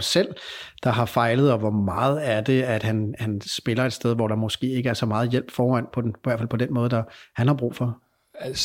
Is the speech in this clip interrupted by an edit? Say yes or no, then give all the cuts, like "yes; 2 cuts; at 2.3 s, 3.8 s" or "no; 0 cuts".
no; 0 cuts